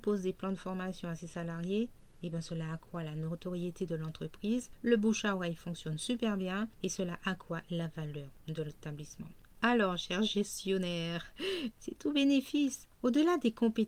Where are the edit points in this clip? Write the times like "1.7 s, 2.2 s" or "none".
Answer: 11.7 s